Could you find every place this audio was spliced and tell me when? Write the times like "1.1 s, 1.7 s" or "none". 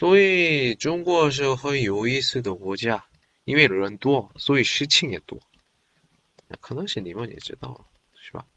none